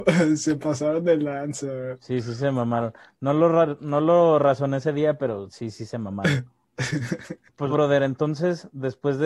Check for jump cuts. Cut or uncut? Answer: cut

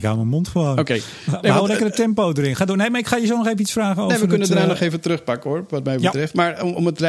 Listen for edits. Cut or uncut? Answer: uncut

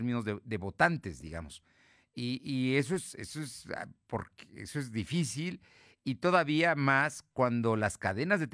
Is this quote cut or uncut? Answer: uncut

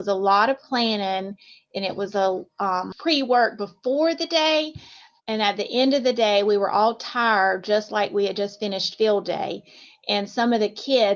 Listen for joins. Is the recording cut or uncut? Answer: cut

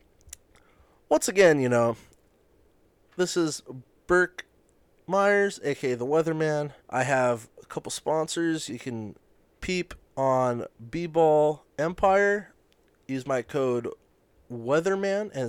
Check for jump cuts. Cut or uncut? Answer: cut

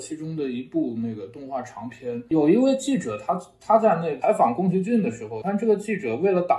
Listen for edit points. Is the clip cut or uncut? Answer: cut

